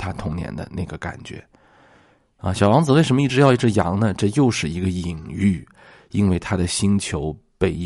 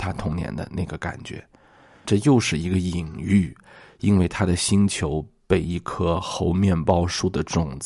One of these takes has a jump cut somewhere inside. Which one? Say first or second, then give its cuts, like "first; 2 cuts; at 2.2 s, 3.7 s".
second; 1 cut; at 2.0 s